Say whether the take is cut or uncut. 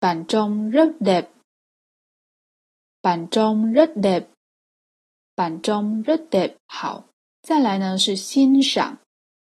cut